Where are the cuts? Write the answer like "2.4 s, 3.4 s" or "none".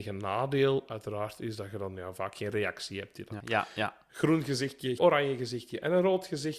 3.4 s, 5.0 s